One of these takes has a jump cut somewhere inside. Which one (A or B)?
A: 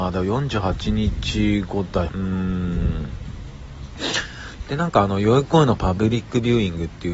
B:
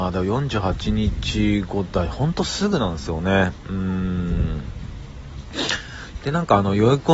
A